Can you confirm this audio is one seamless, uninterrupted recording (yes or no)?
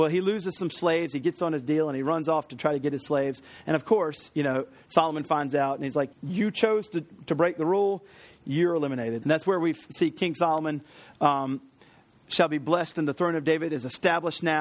no